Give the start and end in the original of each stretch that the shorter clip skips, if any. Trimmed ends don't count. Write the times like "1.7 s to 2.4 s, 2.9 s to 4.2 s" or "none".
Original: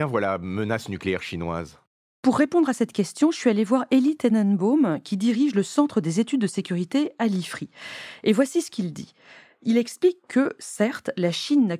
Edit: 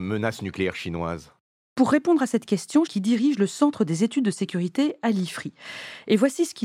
3.3 s to 5.0 s